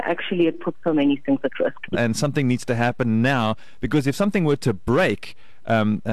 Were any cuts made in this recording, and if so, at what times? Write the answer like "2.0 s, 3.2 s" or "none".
1.9 s